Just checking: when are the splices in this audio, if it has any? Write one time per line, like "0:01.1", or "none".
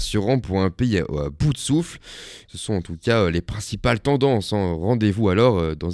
0:02.4